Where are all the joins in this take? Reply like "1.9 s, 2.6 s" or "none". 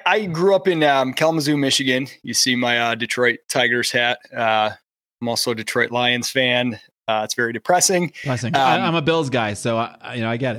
none